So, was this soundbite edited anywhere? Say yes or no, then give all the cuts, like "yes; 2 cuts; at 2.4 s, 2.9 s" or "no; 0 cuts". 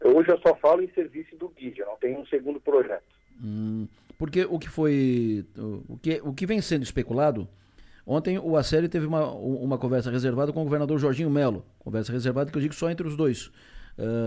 no; 0 cuts